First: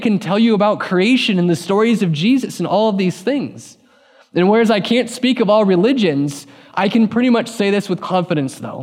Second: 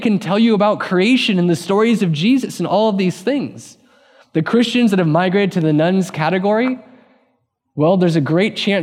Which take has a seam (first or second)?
second